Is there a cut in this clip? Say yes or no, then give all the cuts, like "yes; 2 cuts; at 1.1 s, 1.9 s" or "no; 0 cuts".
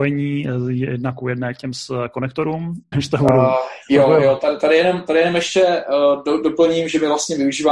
yes; 1 cut; at 2.9 s